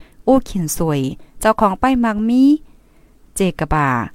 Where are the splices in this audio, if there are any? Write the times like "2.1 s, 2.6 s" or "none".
none